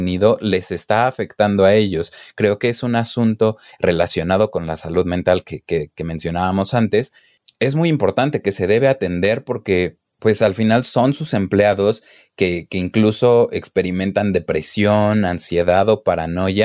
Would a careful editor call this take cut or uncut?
uncut